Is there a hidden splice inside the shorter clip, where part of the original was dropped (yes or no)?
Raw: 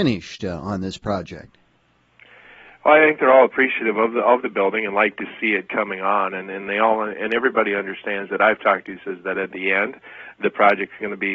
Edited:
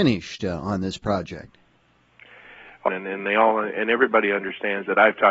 yes